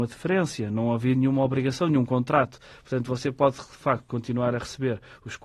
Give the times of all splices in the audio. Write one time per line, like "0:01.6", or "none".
none